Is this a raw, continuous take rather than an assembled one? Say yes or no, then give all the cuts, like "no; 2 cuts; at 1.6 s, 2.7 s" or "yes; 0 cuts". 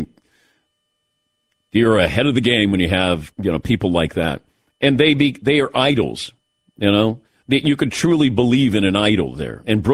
yes; 0 cuts